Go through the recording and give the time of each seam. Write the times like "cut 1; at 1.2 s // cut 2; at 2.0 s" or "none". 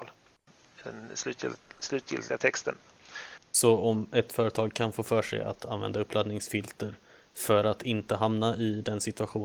cut 1; at 3.4 s